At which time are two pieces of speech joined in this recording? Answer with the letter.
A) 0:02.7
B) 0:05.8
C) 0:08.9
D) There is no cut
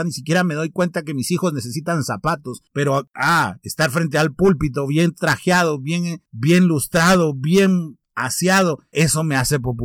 C